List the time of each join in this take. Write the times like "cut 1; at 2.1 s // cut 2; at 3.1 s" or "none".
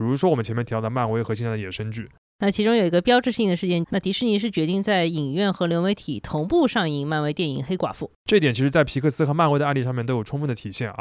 cut 1; at 2.3 s // cut 2; at 3.8 s // cut 3; at 8.2 s